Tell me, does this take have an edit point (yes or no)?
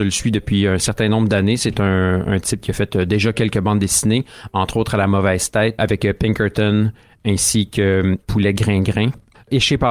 no